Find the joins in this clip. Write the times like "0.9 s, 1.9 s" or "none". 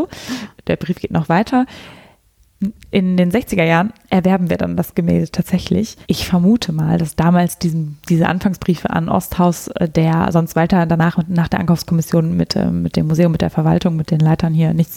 6.0 s